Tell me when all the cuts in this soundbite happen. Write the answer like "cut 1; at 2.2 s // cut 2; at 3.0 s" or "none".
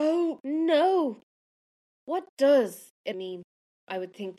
cut 1; at 1.9 s // cut 2; at 3.1 s